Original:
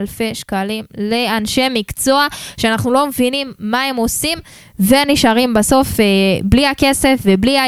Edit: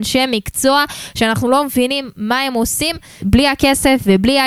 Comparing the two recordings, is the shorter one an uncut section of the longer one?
no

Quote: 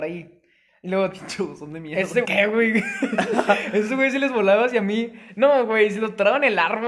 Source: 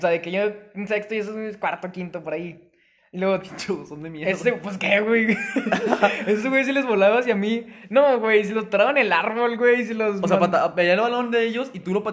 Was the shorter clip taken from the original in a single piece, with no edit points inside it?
no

